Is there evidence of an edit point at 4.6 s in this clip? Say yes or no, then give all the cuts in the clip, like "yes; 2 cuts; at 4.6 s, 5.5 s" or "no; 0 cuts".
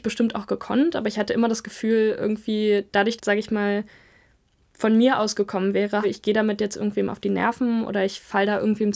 no; 2 cuts; at 3.2 s, 6.0 s